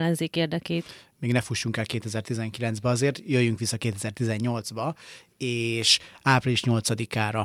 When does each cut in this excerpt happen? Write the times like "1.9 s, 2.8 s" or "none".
none